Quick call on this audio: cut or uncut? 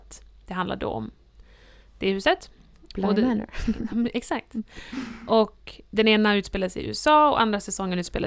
uncut